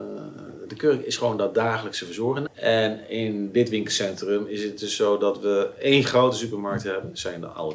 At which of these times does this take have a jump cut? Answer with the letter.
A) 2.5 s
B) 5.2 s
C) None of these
A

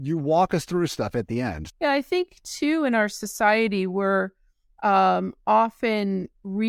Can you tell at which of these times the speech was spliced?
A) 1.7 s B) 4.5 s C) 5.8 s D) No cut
A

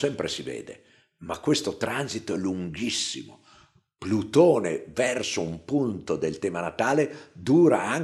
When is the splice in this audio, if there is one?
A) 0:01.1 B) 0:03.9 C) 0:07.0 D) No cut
D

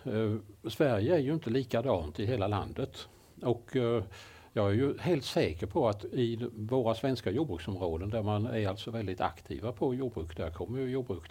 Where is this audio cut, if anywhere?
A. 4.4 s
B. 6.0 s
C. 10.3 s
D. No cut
B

